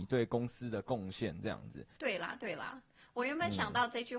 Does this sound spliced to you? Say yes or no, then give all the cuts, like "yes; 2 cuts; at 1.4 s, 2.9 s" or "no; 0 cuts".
yes; 1 cut; at 2.0 s